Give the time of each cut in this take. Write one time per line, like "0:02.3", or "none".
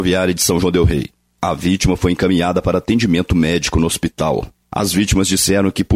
0:04.6